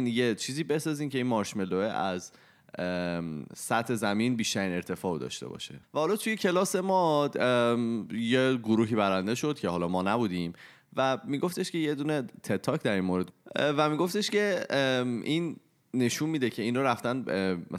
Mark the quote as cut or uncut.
cut